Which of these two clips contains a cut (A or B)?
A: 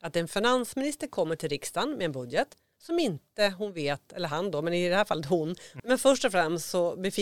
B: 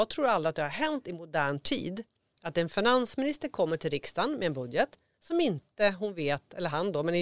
A